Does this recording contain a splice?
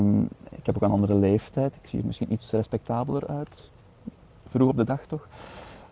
no; 0 cuts

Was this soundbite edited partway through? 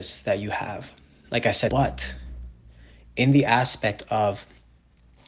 yes; 1 cut; at 1.7 s

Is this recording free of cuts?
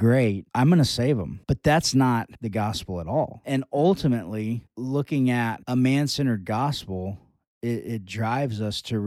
yes; 0 cuts

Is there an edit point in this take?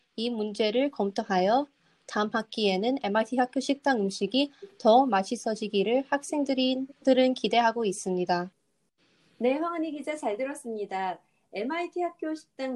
no; 0 cuts

